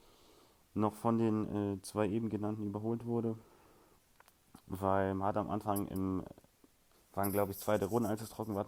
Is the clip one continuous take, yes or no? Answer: no